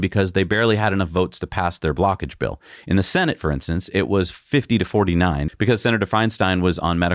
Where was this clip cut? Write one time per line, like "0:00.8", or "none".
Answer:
none